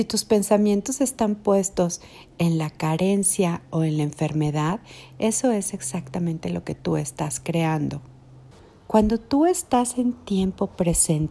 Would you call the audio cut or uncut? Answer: uncut